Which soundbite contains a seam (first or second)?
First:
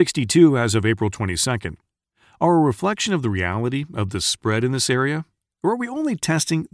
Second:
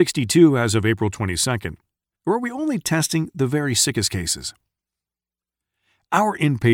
second